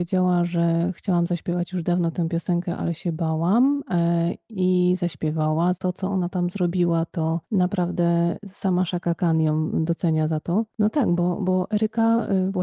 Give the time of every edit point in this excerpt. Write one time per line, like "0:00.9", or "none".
0:05.7
0:10.7